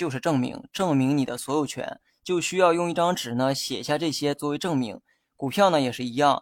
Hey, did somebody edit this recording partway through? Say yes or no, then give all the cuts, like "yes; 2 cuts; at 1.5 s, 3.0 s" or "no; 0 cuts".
yes; 2 cuts; at 2.1 s, 5.2 s